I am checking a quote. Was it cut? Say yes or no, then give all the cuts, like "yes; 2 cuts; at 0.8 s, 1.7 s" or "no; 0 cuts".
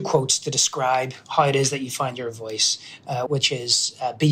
yes; 1 cut; at 3.3 s